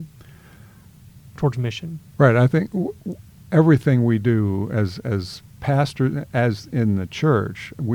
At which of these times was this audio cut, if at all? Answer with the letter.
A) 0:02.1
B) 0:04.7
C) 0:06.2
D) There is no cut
A